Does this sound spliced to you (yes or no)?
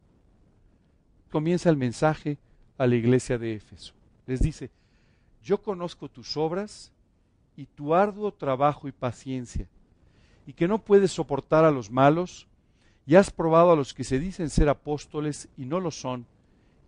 yes